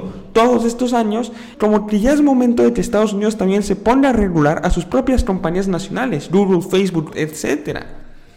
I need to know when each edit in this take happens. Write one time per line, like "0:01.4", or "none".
0:01.5
0:07.1